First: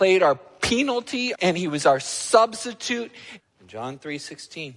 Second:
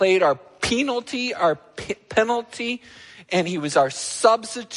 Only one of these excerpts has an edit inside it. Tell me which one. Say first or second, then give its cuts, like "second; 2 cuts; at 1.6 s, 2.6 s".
first; 2 cuts; at 1.3 s, 3.4 s